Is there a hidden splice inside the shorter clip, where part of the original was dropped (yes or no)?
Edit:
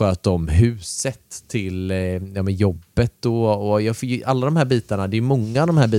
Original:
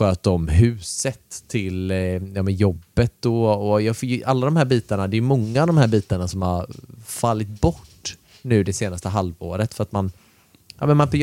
no